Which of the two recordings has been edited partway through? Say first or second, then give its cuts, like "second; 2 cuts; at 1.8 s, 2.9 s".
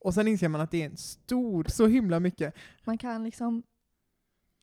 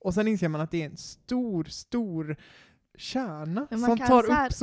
first; 1 cut; at 1.7 s